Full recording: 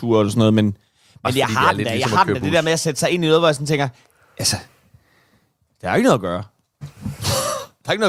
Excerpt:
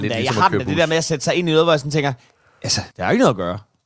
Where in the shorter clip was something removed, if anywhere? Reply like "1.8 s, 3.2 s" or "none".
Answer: 2.9 s